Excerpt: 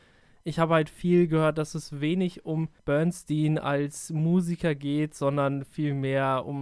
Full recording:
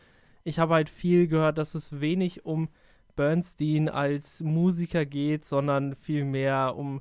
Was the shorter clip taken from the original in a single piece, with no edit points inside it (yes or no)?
no